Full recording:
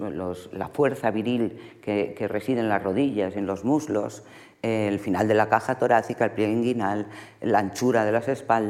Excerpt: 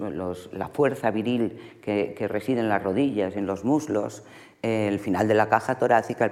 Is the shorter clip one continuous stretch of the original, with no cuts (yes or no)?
yes